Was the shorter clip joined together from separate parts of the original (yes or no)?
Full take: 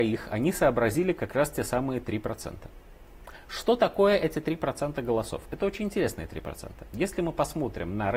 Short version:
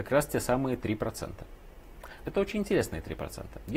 yes